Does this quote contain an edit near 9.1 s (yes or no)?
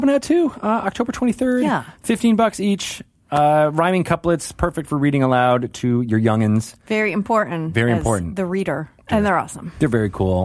yes